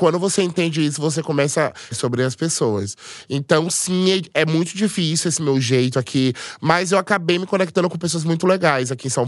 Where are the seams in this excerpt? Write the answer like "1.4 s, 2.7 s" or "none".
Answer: 1.9 s